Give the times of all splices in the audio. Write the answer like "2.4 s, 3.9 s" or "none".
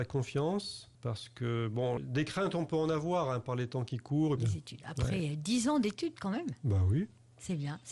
1.0 s, 2.0 s, 4.4 s